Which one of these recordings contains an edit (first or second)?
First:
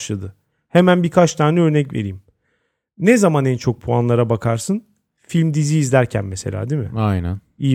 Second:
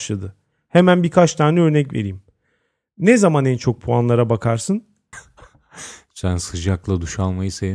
second